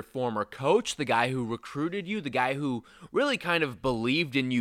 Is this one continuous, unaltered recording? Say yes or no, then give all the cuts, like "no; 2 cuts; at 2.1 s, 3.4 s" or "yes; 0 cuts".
yes; 0 cuts